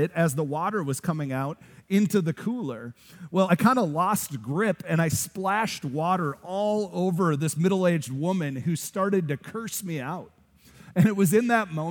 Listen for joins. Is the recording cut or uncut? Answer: uncut